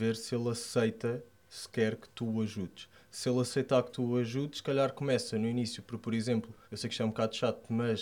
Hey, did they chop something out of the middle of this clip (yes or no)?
yes